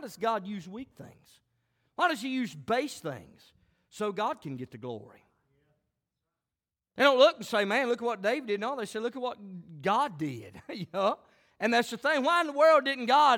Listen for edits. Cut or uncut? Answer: uncut